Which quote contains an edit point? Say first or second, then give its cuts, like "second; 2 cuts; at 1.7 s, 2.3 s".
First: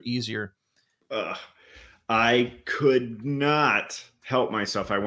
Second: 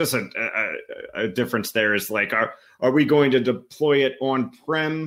first; 1 cut; at 1.0 s